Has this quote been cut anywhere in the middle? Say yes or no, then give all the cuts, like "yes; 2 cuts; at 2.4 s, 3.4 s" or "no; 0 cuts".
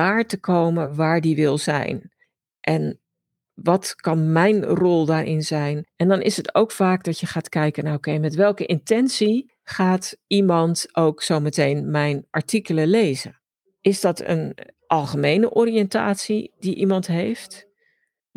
yes; 1 cut; at 5.9 s